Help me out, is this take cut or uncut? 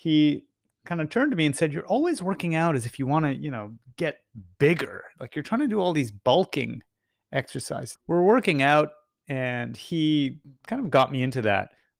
cut